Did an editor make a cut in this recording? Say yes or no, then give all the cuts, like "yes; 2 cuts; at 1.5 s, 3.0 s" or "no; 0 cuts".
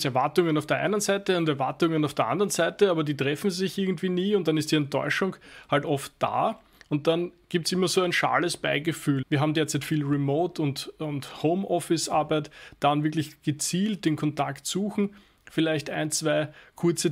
yes; 1 cut; at 9.2 s